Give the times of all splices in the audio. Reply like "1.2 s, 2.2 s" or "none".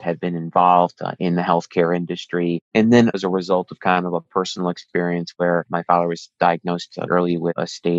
3.1 s, 7.1 s